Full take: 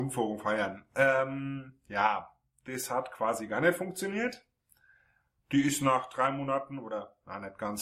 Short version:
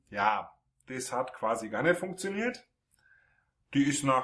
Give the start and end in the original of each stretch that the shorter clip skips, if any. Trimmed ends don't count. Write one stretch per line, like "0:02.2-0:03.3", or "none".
none